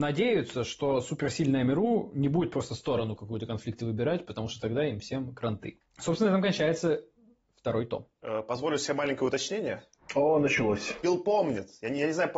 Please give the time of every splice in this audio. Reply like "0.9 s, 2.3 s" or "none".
none